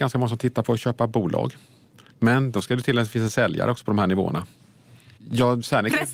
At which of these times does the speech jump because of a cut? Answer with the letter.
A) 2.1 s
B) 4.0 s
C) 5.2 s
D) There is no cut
C